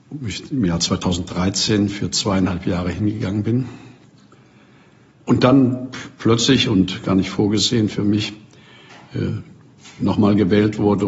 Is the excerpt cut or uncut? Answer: uncut